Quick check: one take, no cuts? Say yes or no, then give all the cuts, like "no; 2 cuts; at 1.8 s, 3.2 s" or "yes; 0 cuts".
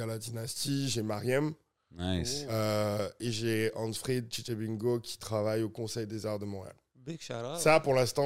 yes; 0 cuts